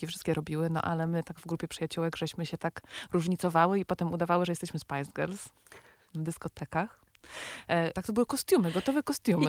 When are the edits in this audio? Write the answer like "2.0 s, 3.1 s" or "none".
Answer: 7.9 s